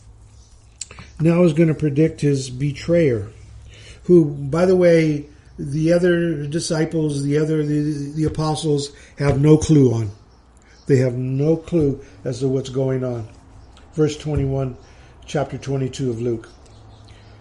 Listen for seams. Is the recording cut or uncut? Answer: uncut